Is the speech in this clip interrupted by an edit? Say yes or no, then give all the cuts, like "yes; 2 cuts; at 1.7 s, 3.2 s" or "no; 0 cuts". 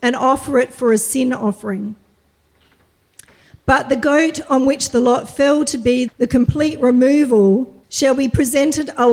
yes; 2 cuts; at 6.1 s, 7.8 s